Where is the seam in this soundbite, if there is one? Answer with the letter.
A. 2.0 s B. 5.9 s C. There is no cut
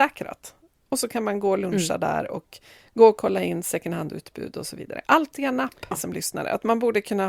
B